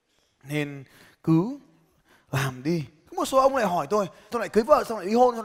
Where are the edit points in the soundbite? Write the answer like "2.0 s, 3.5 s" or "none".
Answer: 4.3 s